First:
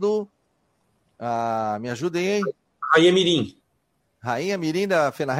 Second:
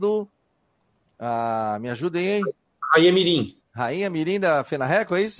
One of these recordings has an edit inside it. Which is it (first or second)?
second